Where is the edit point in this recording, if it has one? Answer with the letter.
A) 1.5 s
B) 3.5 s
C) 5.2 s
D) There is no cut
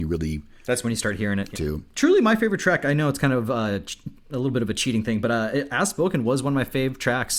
A